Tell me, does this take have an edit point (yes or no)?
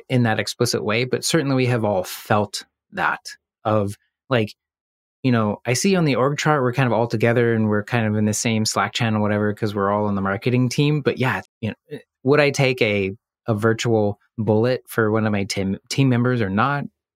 yes